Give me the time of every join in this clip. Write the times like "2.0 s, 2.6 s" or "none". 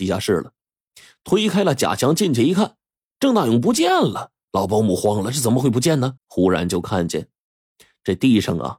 6.2 s